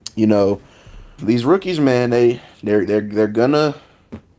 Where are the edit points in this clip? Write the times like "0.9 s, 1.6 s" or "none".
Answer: 1.2 s